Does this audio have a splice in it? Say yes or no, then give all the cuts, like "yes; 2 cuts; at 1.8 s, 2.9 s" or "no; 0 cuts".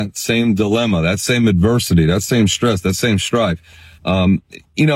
no; 0 cuts